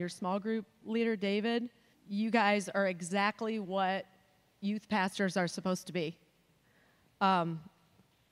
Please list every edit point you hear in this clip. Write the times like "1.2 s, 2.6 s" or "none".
1.9 s